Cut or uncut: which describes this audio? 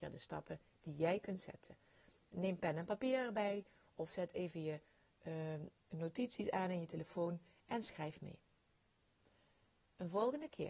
uncut